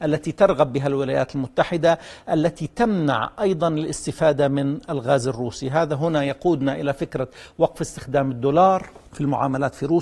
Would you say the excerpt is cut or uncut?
cut